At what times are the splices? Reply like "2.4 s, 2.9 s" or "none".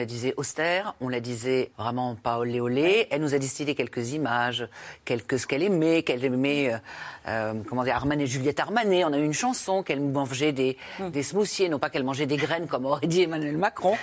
1.7 s